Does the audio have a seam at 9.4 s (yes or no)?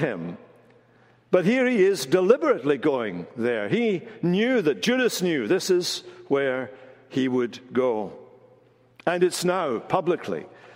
no